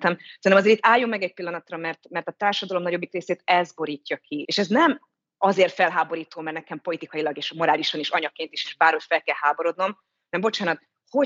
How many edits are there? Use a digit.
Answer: 1